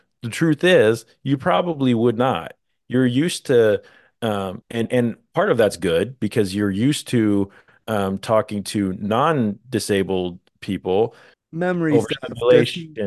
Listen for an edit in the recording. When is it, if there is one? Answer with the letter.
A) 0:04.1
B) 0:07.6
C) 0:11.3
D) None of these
C